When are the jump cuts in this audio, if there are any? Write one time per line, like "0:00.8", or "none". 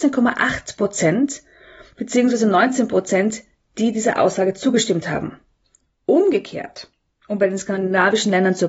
none